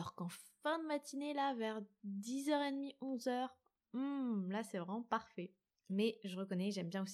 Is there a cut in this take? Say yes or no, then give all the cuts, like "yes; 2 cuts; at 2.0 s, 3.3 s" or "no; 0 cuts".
no; 0 cuts